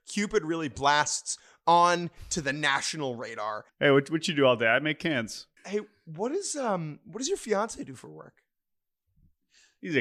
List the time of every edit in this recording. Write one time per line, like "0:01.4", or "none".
0:03.7
0:05.6